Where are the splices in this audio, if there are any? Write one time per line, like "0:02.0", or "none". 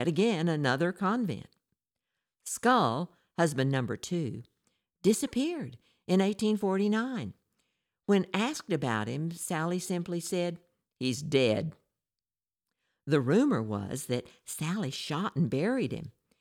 none